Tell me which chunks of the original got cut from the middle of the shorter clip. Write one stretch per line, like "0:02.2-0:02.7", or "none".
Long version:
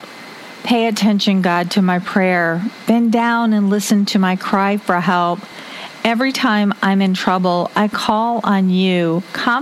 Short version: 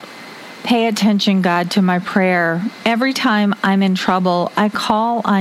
0:02.8-0:06.0